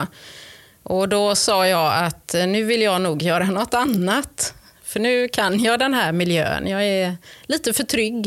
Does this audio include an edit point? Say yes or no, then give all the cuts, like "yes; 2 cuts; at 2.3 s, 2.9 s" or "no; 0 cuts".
no; 0 cuts